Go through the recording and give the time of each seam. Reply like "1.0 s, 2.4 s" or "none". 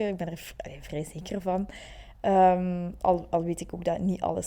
none